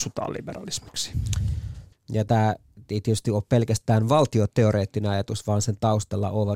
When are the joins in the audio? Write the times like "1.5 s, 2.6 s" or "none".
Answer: 1.9 s